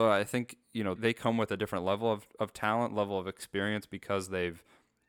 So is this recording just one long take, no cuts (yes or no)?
no